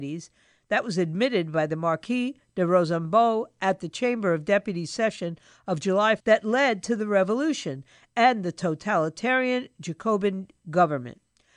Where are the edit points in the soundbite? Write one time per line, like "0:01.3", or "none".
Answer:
0:06.2

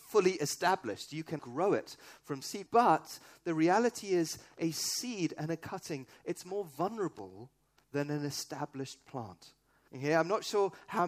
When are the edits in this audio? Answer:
0:01.4
0:02.7
0:09.9

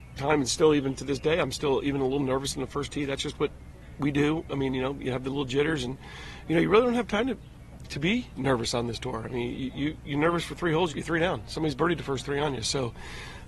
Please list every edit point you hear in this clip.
0:10.9

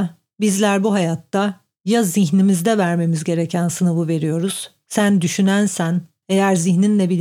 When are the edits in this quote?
0:06.2

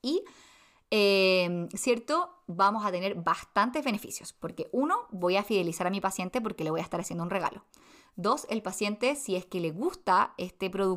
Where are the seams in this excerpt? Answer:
none

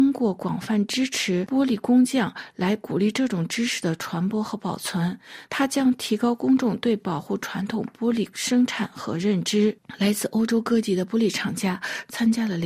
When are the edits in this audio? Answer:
none

